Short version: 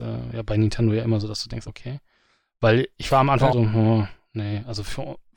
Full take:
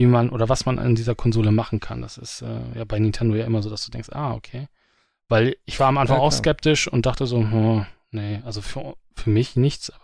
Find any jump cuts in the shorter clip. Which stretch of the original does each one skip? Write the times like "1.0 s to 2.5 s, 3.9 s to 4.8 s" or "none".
4.1 s to 4.4 s, 6.2 s to 7.3 s